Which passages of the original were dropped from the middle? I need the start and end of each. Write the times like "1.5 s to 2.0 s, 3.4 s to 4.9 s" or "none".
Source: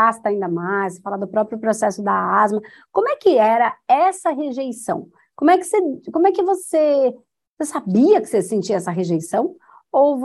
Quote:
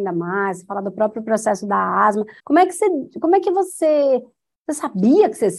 2.8 s to 5.3 s